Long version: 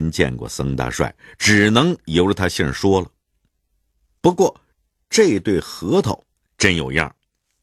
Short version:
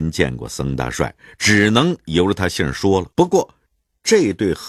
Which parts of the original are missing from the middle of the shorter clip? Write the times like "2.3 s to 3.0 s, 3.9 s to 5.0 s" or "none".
3.1 s to 4.2 s